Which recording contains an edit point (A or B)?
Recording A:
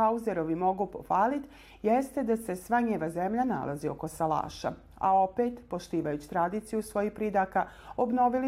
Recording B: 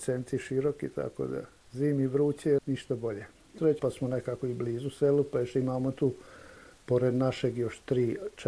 B